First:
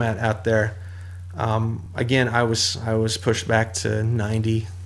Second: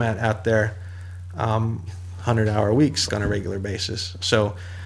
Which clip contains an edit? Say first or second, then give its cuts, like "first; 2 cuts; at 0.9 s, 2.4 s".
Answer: second; 2 cuts; at 1.9 s, 3.1 s